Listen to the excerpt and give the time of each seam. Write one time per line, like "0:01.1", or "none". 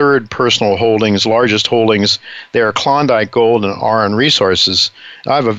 none